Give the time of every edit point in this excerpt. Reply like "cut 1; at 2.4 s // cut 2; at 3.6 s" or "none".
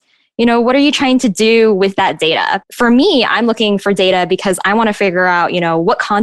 cut 1; at 2.6 s

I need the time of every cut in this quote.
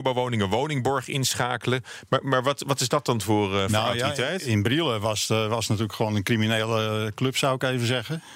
none

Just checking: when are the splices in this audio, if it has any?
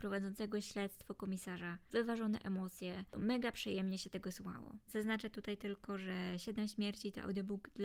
cut 1; at 4.9 s

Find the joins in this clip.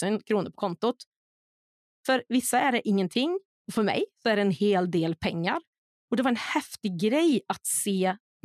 cut 1; at 3.6 s

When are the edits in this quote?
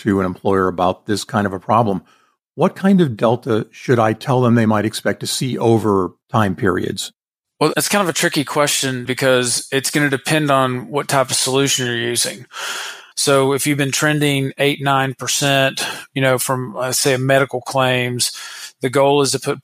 cut 1; at 7.7 s // cut 2; at 9.1 s // cut 3; at 13.1 s

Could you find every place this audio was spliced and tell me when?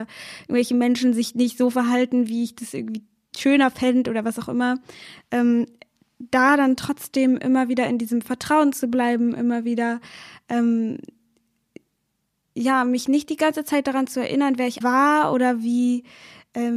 cut 1; at 14.8 s

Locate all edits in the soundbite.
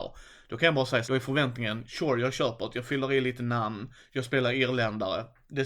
cut 1; at 1.0 s

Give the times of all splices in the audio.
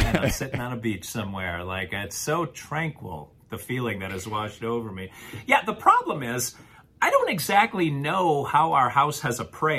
none

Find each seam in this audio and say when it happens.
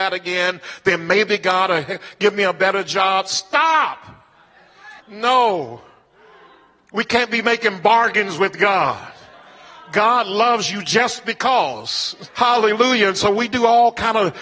cut 1; at 5.0 s // cut 2; at 12.3 s

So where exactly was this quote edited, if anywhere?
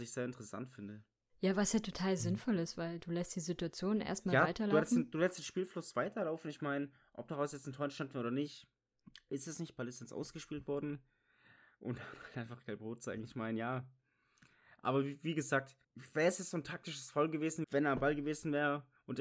cut 1; at 15.8 s // cut 2; at 17.6 s

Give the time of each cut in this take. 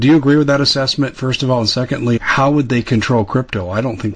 cut 1; at 2.2 s

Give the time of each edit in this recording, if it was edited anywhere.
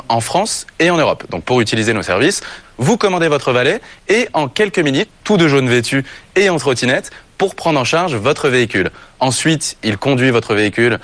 cut 1; at 2.6 s // cut 2; at 5.1 s

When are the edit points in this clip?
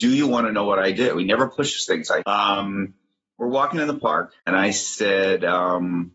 cut 1; at 2.2 s // cut 2; at 4.4 s

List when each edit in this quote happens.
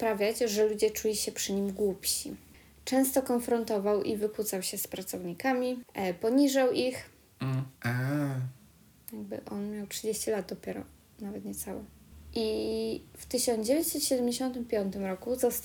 cut 1; at 7.7 s

